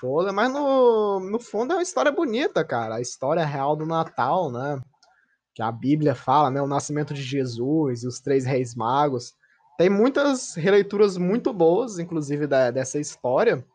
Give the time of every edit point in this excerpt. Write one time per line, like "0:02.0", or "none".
none